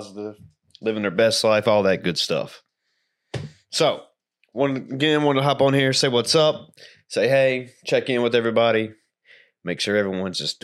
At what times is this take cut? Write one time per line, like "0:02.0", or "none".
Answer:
none